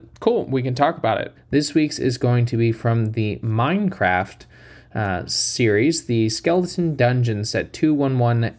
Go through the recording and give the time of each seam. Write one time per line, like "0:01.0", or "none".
0:01.4